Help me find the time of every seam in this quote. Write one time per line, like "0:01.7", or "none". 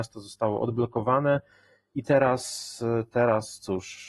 none